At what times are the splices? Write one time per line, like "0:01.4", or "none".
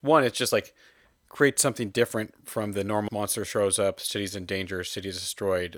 0:03.1

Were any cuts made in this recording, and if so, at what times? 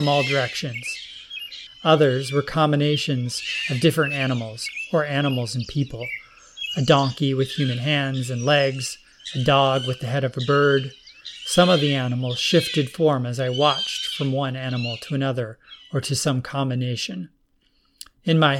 0:01.7

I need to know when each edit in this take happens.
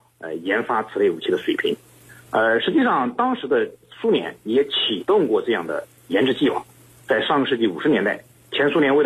none

